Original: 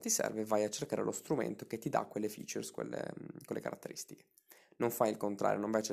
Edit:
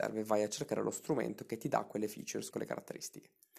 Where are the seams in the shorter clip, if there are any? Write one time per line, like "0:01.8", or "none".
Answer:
0:02.5